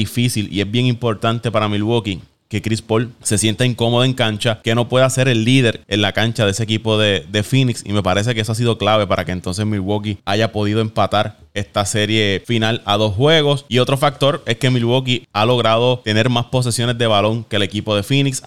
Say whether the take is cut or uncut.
uncut